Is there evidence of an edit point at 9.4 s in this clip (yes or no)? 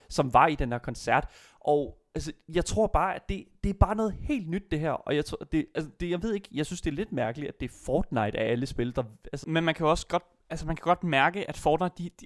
yes